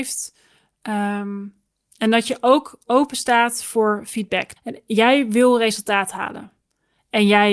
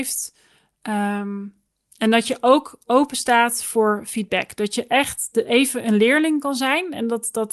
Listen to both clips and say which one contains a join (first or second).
first